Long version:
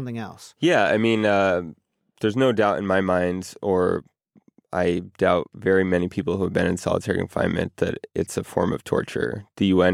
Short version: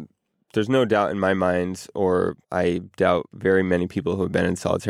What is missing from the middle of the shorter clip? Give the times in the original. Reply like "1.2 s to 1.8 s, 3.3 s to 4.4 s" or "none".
4.1 s to 4.6 s